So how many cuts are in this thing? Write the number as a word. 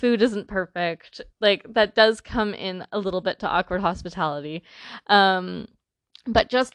one